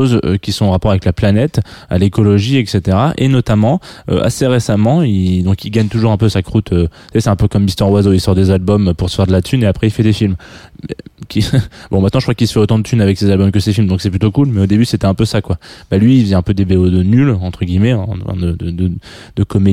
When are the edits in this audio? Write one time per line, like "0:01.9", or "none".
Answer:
none